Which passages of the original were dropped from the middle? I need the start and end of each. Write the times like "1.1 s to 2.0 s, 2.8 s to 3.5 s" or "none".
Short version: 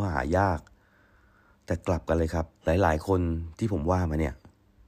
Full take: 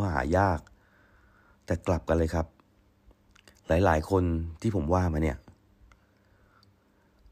2.6 s to 3.6 s